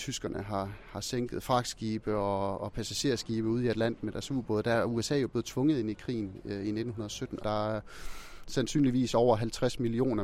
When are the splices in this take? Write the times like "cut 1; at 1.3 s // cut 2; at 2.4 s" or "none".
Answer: cut 1; at 7.4 s